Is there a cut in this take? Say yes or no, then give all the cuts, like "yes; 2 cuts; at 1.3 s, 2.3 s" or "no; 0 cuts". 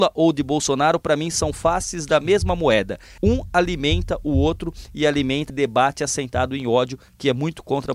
yes; 2 cuts; at 3.2 s, 5.5 s